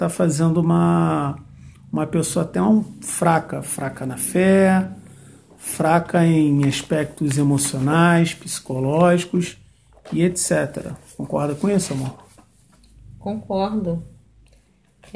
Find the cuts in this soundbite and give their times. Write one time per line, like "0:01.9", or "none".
none